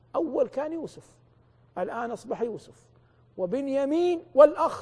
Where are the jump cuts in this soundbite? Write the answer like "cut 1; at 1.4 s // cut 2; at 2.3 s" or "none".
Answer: none